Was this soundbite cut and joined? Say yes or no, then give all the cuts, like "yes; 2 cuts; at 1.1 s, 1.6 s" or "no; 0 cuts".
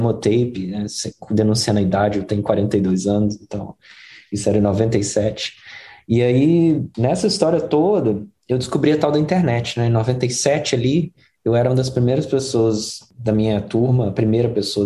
no; 0 cuts